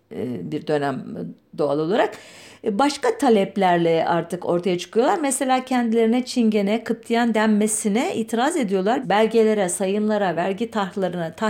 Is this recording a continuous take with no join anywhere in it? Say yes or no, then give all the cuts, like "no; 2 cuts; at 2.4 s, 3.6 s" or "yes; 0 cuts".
no; 2 cuts; at 9.0 s, 10.4 s